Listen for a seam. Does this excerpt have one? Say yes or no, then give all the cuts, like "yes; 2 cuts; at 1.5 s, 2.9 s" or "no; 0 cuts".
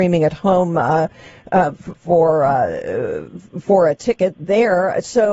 yes; 1 cut; at 1.9 s